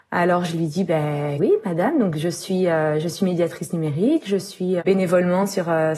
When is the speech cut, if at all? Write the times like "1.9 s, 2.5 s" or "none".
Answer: 1.4 s, 4.8 s